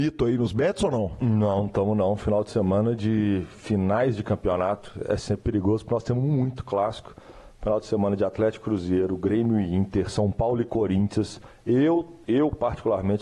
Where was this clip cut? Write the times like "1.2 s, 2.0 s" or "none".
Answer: 5.4 s